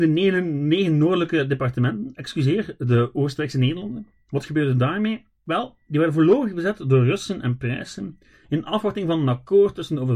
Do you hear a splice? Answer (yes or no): no